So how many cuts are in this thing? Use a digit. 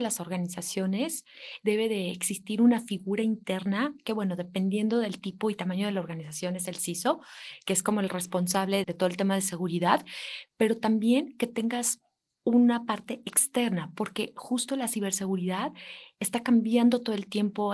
1